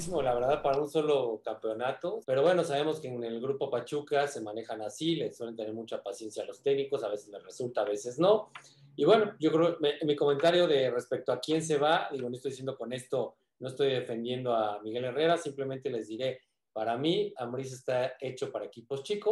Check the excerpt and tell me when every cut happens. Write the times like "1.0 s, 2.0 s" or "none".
2.2 s